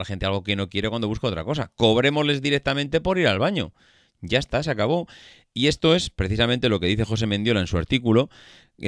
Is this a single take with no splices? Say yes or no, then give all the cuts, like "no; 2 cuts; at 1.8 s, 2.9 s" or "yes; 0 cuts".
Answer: yes; 0 cuts